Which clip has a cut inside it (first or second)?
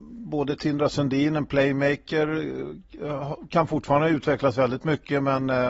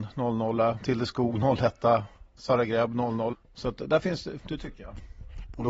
second